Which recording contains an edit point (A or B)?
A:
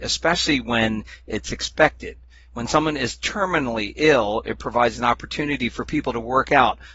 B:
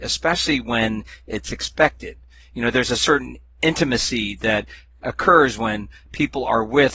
B